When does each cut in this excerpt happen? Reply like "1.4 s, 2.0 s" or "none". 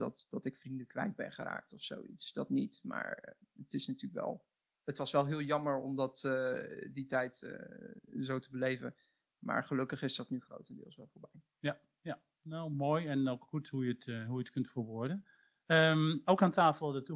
none